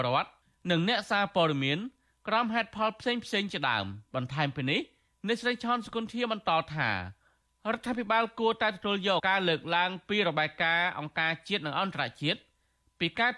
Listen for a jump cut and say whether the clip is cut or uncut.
cut